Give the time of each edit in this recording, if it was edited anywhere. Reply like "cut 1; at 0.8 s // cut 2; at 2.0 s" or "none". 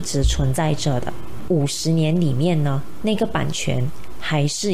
cut 1; at 1.5 s